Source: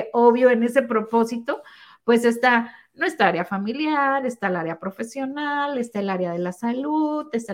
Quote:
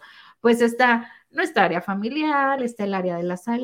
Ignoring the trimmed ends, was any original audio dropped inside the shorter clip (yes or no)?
yes